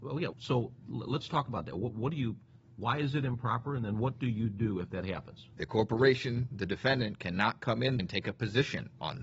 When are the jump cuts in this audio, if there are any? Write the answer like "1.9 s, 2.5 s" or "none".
5.5 s, 8.0 s